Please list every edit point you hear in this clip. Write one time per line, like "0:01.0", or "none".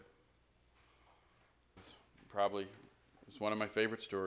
0:01.8